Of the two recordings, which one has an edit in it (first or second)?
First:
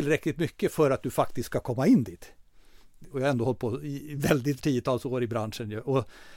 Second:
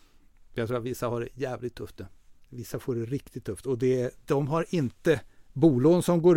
first